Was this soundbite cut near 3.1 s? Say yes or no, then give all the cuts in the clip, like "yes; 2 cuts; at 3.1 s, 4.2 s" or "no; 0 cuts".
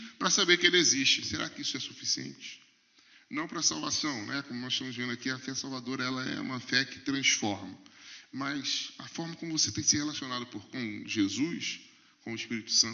no; 0 cuts